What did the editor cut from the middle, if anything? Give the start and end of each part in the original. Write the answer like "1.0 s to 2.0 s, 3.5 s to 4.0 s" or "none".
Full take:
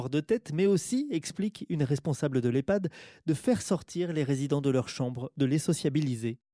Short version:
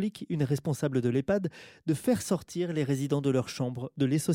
none